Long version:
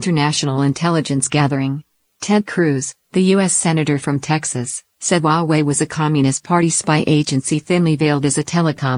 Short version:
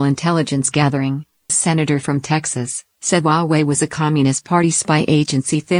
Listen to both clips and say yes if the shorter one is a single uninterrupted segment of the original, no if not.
no